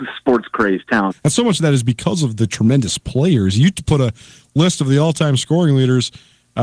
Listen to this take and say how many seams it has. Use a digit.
1